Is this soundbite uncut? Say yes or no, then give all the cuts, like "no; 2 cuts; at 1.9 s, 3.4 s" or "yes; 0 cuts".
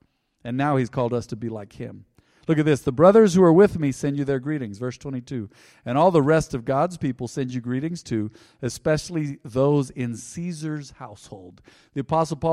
yes; 0 cuts